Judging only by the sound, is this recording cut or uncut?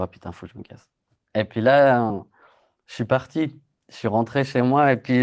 uncut